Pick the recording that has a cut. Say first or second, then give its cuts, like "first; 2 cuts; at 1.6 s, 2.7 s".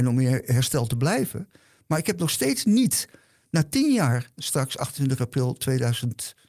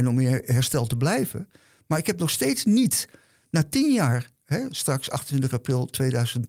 first; 1 cut; at 4.4 s